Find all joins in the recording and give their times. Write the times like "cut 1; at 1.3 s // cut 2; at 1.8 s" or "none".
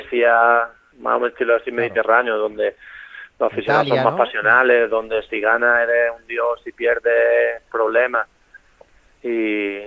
none